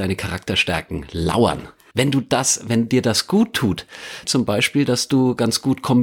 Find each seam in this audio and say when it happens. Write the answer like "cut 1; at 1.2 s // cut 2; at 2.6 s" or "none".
cut 1; at 1.9 s // cut 2; at 4.2 s